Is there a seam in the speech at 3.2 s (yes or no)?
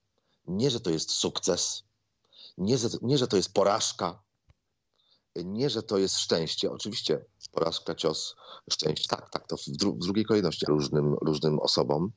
no